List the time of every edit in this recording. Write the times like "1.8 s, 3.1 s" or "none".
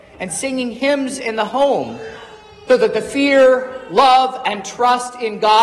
2.7 s